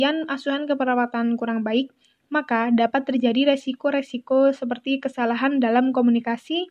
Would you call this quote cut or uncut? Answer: uncut